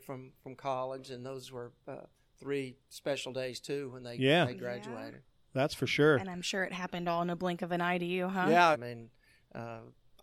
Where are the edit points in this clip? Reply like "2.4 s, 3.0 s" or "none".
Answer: 8.7 s